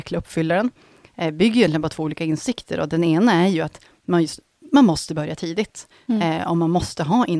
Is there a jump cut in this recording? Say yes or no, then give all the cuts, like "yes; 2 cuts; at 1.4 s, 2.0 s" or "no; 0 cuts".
no; 0 cuts